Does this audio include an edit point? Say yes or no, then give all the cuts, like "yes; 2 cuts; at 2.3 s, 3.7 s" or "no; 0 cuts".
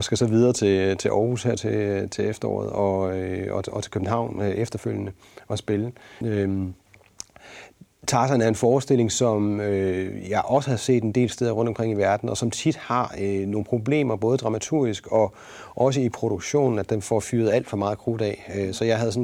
yes; 1 cut; at 6.2 s